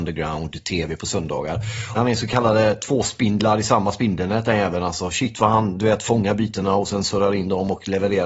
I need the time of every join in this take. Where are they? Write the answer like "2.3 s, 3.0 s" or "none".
1.9 s